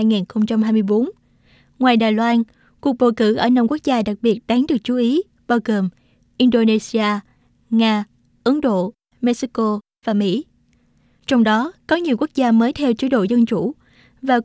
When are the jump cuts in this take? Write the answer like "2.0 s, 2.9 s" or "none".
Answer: none